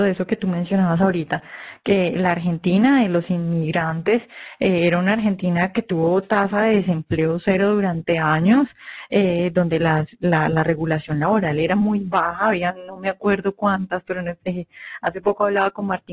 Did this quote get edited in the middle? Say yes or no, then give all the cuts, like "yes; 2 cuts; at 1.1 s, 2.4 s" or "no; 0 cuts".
no; 0 cuts